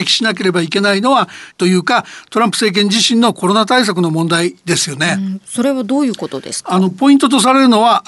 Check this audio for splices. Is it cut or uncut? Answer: cut